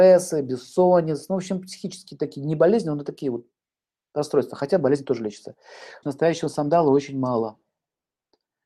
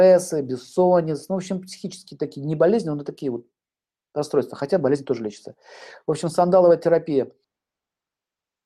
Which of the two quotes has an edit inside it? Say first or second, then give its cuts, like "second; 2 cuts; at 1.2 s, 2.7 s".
first; 1 cut; at 6.0 s